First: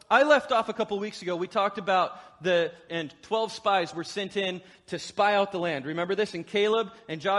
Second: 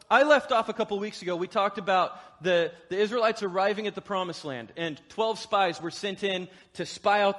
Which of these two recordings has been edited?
first; 1 cut; at 2.9 s

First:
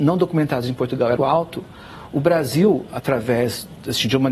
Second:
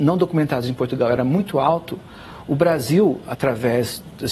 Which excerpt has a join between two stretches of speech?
first; 1 cut; at 1.2 s

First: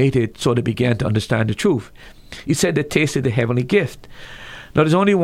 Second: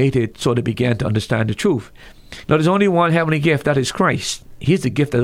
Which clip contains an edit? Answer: second; 1 cut; at 2.4 s

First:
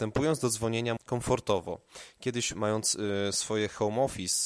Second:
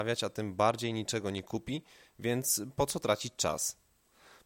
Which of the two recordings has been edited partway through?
first; 1 cut; at 1.0 s

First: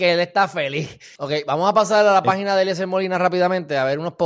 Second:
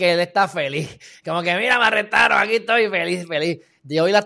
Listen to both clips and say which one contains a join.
first; 1 cut; at 1.2 s

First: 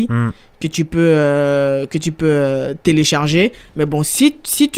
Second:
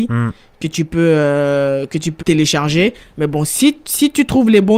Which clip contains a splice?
second; 1 cut; at 2.2 s

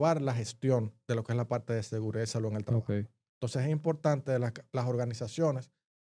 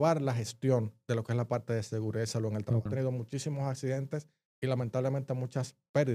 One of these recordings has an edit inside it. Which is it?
second; 1 cut; at 2.9 s

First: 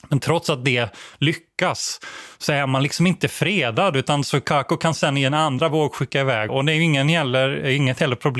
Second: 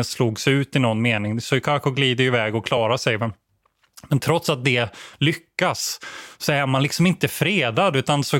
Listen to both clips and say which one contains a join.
first; 1 cut; at 6.5 s

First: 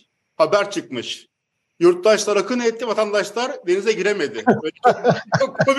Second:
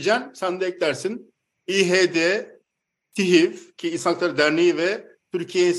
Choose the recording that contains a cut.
second; 1 cut; at 1.6 s

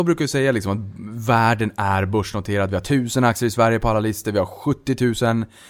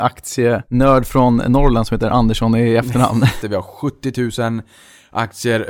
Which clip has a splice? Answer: second; 1 cut; at 3.4 s

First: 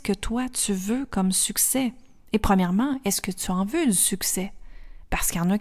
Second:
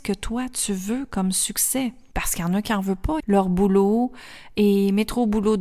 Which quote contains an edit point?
second; 2 cuts; at 2.1 s, 3.2 s

